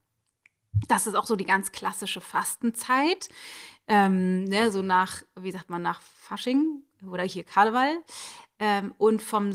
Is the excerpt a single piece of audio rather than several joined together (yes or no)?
yes